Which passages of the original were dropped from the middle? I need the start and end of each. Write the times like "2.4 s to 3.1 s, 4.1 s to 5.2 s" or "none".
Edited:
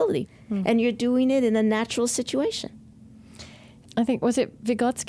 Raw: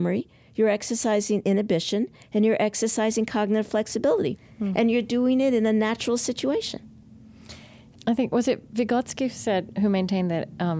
none

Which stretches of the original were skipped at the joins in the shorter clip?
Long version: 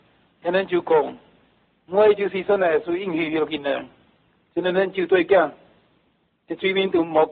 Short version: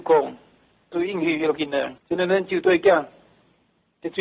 1.7 s to 2.8 s, 3.9 s to 4.4 s

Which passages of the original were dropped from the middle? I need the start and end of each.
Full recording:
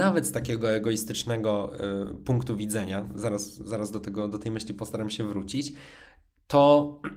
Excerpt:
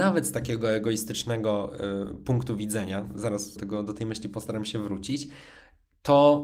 3.6 s to 4.0 s

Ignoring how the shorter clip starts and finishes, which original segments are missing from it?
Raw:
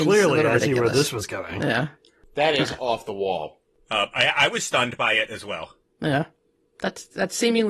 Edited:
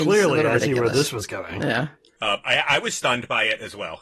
2.2 s to 3.9 s

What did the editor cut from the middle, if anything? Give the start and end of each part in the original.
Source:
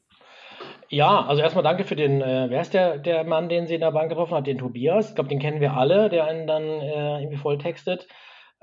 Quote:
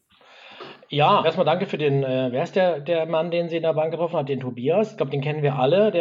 1.2 s to 1.4 s

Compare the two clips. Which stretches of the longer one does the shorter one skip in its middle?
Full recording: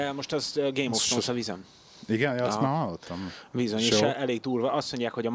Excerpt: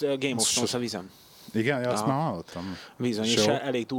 none

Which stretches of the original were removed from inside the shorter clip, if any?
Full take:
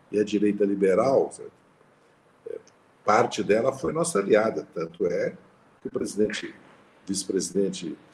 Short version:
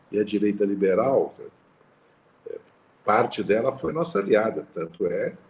none

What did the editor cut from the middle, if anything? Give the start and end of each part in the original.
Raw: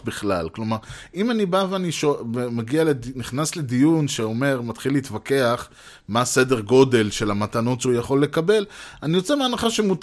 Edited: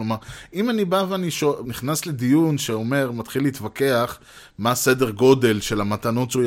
2.2 s to 3.1 s

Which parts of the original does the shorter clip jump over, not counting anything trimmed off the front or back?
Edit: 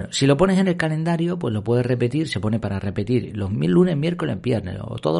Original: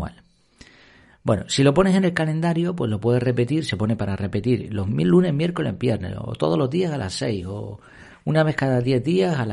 none

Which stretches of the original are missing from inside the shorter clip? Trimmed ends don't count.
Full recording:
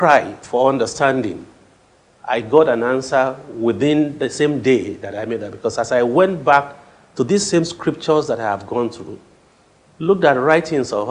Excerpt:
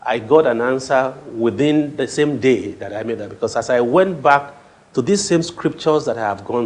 none

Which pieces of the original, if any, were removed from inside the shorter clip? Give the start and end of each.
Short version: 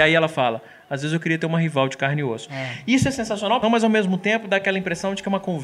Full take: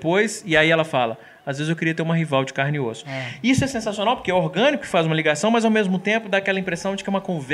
4.2 s to 5.4 s

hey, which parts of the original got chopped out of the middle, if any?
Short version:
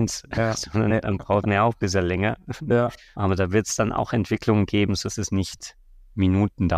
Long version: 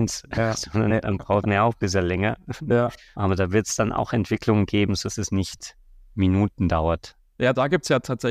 none

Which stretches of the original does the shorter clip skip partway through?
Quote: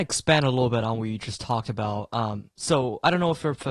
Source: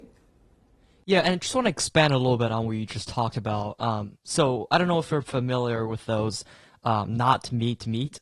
none

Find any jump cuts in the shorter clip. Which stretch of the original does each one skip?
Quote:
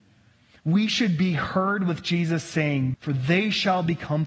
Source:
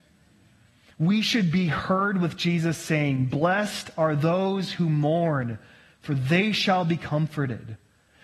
3.3 s to 6.0 s

